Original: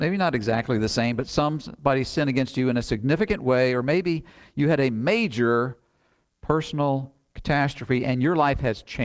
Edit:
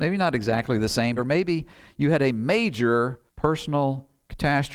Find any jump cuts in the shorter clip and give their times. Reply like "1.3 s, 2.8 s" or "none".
1.2 s, 3.3 s